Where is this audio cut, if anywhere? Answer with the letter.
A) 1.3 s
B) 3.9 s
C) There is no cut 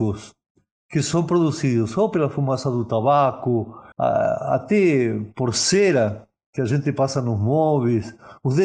B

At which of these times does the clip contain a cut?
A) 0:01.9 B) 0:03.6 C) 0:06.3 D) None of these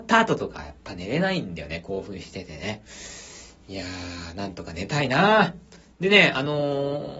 D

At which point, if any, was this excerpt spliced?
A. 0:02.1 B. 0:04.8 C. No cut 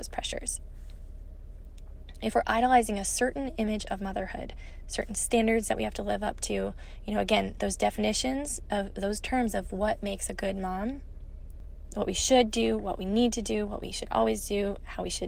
C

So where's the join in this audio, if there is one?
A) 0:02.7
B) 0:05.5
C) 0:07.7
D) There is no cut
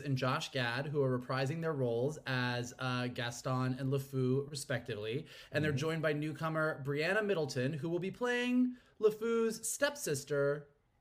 D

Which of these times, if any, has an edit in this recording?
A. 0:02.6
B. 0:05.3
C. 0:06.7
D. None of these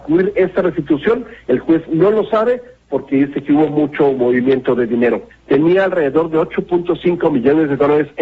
B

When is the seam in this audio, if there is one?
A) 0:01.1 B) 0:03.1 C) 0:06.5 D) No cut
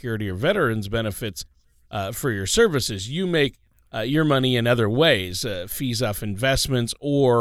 D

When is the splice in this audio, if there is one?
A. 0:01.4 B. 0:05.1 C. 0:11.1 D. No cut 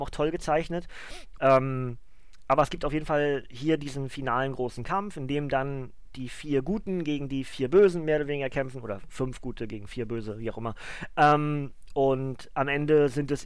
A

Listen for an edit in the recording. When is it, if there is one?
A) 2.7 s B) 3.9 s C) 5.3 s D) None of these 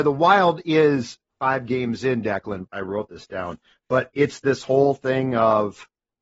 A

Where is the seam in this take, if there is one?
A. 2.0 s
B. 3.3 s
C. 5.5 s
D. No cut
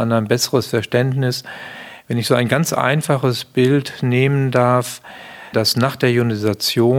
C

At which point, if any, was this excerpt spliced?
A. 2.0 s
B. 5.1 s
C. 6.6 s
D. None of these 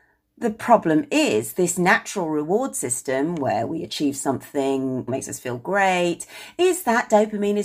B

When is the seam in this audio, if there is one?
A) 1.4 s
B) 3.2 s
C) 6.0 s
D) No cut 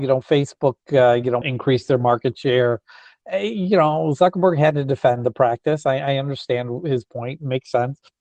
A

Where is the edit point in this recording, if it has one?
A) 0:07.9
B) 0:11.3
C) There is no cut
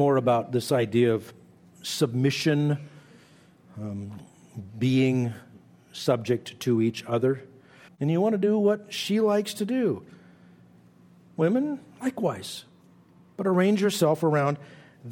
A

